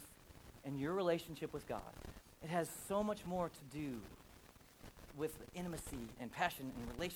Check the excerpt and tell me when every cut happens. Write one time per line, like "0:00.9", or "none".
0:05.1
0:06.2

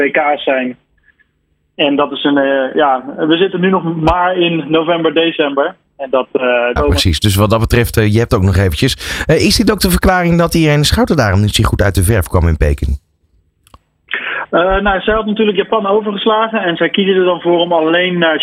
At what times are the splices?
0:06.8

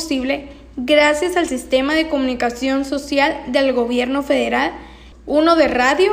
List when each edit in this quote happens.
0:05.1

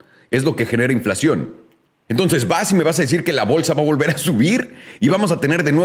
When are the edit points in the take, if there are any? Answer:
0:02.1

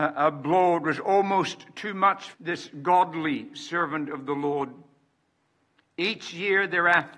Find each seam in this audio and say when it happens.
0:02.3

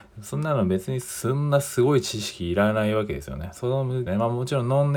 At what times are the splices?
0:04.1

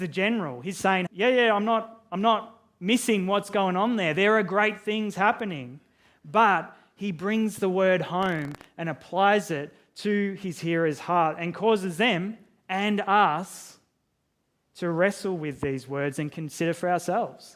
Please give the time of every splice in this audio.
0:01.1

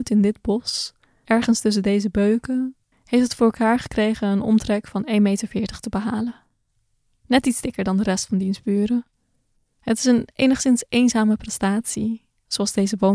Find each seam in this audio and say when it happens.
0:02.9

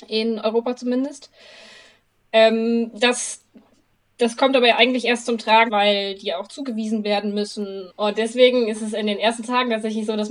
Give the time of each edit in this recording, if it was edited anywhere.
0:05.7
0:07.9

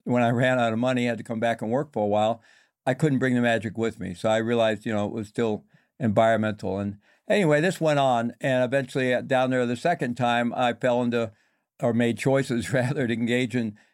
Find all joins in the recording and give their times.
none

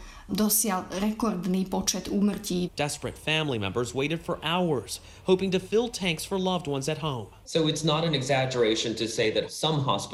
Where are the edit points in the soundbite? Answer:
0:02.7
0:07.4

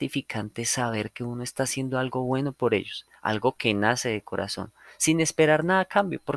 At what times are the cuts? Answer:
none

